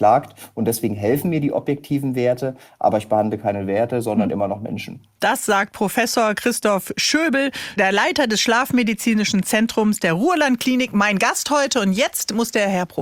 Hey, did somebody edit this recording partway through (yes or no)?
no